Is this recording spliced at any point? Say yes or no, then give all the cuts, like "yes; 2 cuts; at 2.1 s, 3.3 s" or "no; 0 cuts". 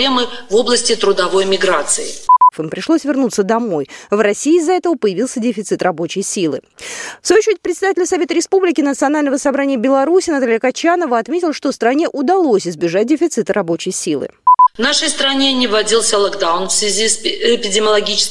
yes; 1 cut; at 2.5 s